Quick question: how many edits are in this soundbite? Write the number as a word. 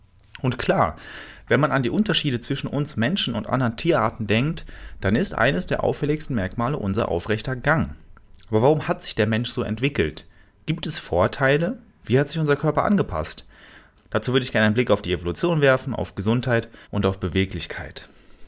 two